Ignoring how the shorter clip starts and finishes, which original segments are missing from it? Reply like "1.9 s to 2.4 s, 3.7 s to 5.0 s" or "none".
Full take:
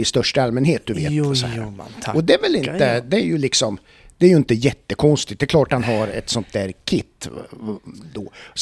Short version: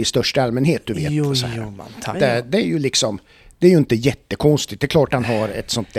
2.1 s to 2.7 s